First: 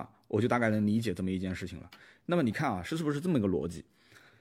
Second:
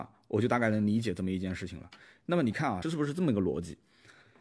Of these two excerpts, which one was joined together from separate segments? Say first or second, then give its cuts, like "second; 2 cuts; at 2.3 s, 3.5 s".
second; 1 cut; at 2.8 s